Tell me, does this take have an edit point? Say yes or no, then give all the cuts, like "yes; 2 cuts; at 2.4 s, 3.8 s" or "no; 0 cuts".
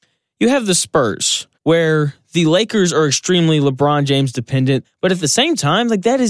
yes; 2 cuts; at 1.5 s, 4.8 s